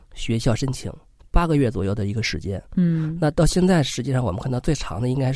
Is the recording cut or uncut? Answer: cut